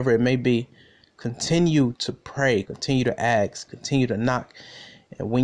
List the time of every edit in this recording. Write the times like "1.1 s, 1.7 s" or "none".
2.6 s, 3.7 s